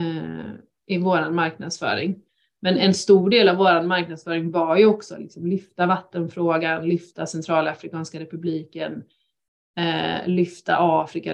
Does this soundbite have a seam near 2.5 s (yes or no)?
no